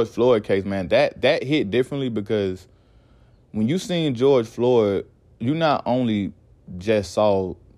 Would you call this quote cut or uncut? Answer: uncut